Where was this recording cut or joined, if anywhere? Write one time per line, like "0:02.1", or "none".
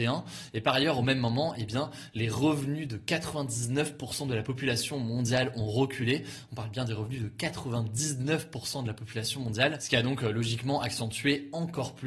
none